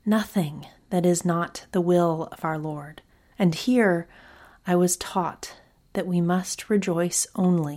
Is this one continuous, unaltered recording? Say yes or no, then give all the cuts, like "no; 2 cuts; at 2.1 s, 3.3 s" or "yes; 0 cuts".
no; 1 cut; at 3.3 s